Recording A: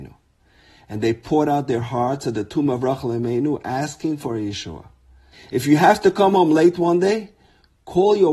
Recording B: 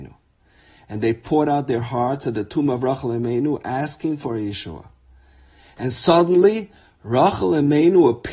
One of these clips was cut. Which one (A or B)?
A